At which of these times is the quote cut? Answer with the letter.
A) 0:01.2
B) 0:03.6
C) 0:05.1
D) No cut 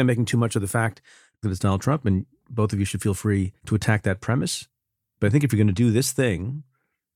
B